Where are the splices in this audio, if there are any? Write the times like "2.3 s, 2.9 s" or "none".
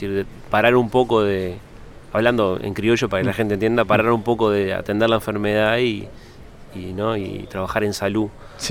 none